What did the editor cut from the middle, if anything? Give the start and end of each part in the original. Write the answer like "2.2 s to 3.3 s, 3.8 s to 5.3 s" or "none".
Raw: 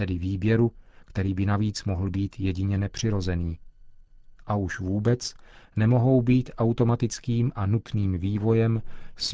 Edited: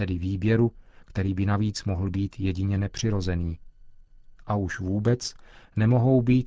none